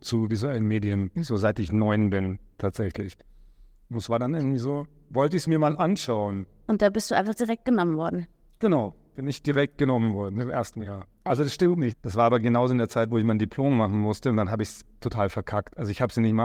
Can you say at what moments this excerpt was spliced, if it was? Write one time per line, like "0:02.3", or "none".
0:11.9
0:15.0